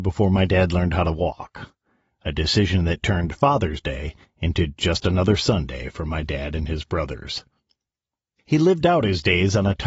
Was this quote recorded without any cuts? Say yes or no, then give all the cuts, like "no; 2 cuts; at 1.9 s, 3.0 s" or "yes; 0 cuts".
yes; 0 cuts